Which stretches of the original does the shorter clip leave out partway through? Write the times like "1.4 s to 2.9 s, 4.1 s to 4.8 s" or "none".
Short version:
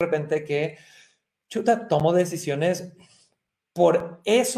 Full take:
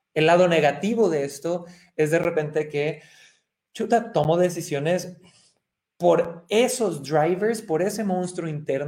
none